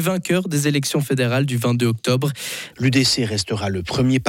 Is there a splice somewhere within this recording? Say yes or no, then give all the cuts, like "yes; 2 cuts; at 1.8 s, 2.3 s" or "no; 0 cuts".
yes; 1 cut; at 2.7 s